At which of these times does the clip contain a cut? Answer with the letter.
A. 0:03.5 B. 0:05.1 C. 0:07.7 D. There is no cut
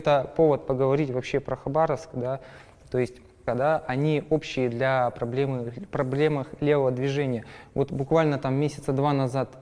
A